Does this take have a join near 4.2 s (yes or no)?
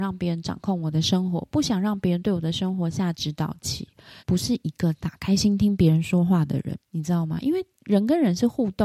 yes